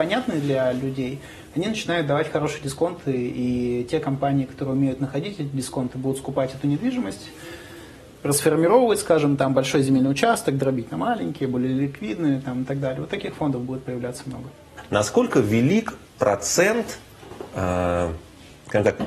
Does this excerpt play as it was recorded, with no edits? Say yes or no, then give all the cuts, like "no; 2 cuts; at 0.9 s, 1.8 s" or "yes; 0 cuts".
yes; 0 cuts